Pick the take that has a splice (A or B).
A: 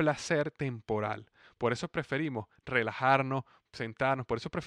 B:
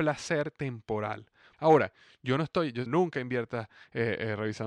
B